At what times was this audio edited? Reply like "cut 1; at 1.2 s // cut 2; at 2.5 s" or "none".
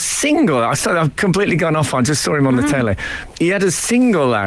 none